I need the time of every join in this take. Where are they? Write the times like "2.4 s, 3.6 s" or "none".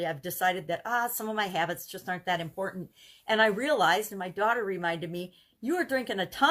none